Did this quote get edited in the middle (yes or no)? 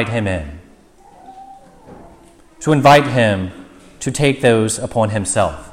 no